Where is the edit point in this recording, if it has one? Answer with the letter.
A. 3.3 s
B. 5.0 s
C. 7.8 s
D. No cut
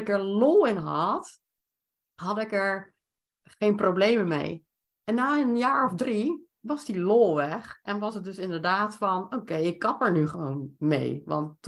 D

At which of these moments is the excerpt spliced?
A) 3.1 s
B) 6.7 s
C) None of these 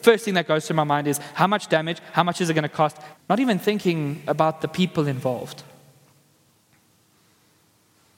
A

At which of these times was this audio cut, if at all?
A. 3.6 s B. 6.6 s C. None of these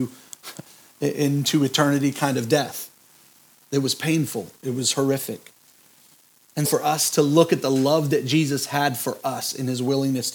B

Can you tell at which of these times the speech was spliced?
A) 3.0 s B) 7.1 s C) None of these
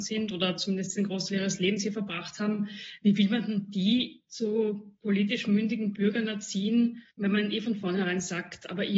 B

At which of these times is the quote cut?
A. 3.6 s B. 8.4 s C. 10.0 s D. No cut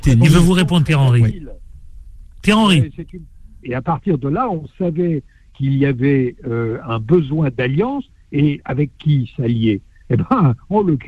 A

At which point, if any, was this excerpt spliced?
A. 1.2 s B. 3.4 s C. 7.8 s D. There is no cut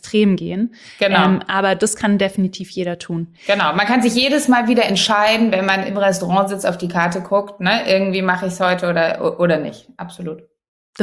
D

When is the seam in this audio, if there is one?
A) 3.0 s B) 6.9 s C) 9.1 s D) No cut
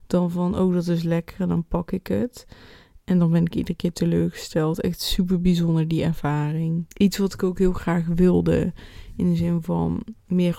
B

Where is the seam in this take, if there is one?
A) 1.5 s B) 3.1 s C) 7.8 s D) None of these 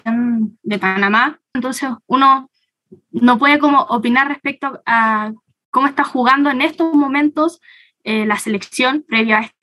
A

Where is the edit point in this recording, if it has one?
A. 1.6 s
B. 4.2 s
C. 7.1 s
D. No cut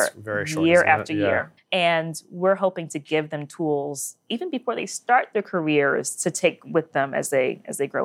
A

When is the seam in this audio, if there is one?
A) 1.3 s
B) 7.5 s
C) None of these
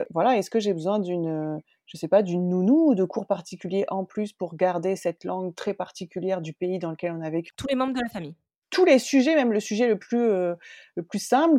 B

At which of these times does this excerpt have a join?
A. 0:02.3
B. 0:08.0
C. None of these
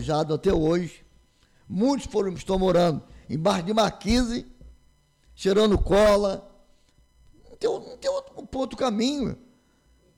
A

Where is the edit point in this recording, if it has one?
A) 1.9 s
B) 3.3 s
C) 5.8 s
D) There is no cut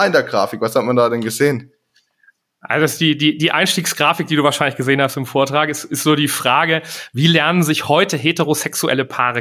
D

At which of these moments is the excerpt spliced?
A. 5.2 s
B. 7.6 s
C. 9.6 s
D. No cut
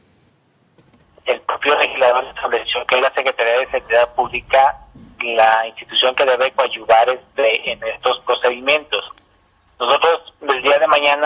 A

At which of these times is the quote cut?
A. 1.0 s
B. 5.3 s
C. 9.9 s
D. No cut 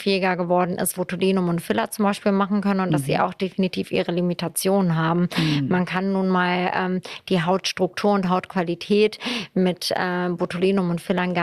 A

